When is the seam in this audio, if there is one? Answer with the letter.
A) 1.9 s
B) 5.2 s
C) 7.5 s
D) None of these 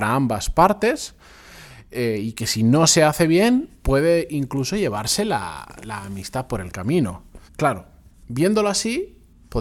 C